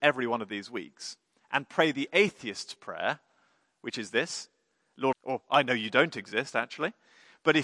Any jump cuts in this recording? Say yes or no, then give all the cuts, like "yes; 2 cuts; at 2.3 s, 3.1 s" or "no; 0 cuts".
yes; 1 cut; at 5.1 s